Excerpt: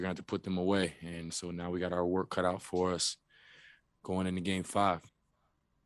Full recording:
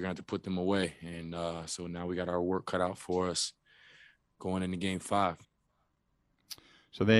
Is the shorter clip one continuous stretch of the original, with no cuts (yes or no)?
no